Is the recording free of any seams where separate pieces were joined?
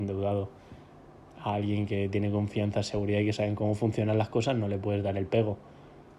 no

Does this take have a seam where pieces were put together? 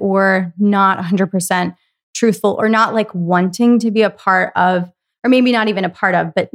no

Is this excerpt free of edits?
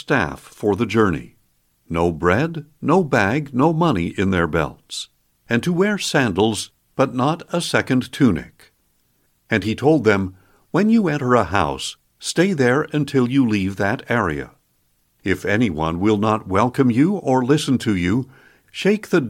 yes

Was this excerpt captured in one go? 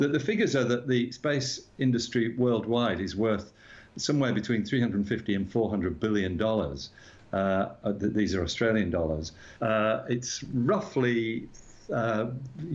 no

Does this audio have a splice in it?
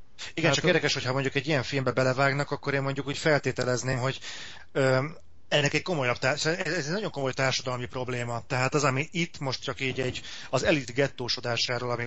no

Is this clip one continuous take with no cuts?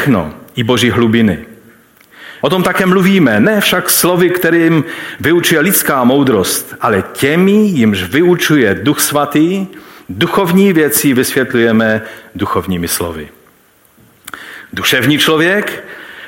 no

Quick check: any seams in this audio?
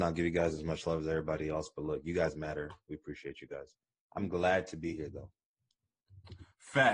no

